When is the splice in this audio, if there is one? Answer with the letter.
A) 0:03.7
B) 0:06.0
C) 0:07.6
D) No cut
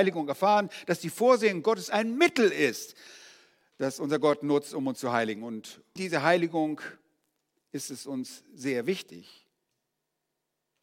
B